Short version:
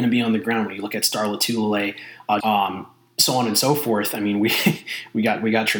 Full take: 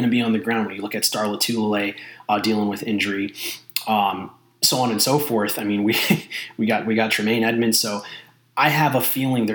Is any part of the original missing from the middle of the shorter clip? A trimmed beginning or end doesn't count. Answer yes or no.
yes